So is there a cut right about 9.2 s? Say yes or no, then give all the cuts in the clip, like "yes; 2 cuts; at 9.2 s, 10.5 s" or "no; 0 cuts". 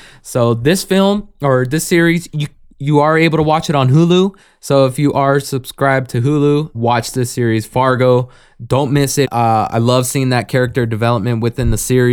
yes; 2 cuts; at 6.7 s, 9.2 s